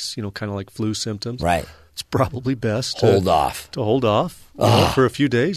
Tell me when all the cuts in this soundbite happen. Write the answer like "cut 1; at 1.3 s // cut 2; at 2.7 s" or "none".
none